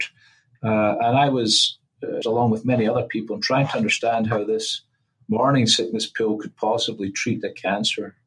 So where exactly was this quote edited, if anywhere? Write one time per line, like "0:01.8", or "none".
0:02.2